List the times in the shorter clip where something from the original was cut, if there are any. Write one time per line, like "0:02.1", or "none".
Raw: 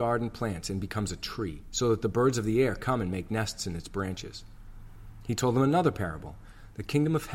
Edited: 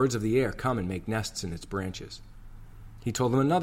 none